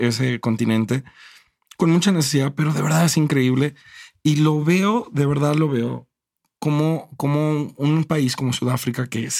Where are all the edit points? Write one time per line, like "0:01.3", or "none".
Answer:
none

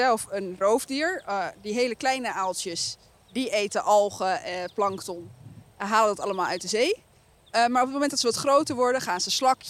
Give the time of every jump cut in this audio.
none

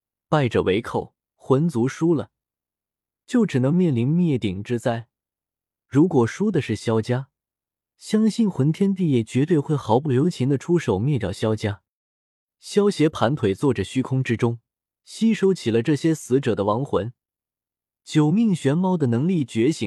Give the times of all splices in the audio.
0:14.9

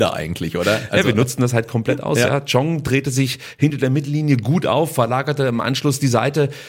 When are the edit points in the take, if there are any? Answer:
none

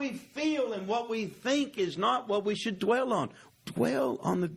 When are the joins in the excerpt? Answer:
0:03.5

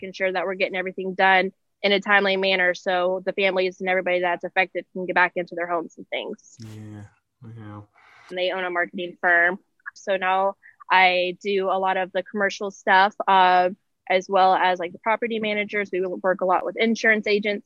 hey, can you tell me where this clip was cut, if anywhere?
0:08.3
0:10.0

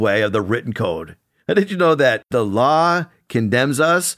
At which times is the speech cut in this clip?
none

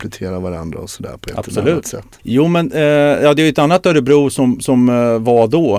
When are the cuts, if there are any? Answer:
0:02.2

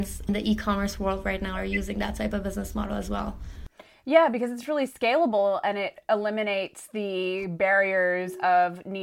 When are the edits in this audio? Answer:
none

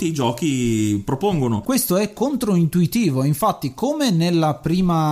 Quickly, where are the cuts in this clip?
0:01.6

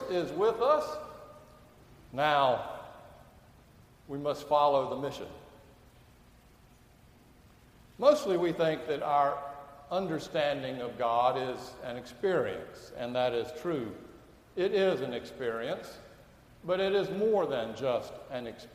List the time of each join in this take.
none

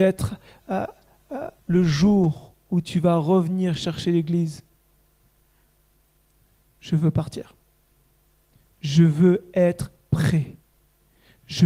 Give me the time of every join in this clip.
0:01.6

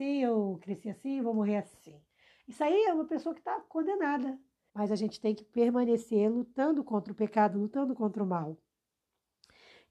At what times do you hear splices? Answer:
0:04.7

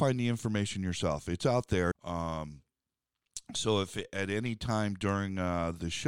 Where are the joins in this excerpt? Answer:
0:01.9

